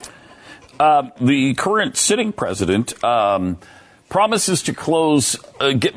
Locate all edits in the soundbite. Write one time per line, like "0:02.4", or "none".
0:01.2